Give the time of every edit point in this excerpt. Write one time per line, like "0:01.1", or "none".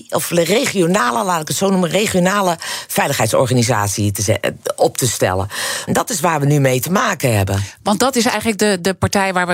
0:05.9